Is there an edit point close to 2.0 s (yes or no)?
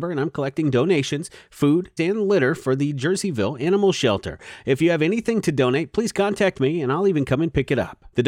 yes